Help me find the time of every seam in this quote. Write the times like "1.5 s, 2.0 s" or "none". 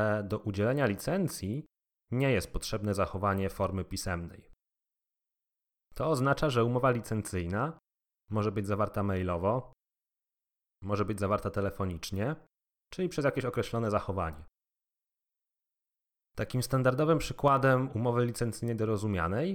12.8 s